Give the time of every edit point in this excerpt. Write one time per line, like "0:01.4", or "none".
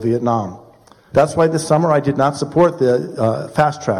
0:01.1